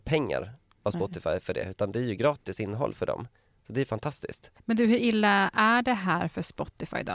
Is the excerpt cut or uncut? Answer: cut